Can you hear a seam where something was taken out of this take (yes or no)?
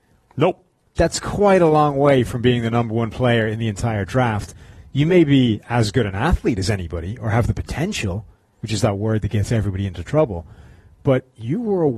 yes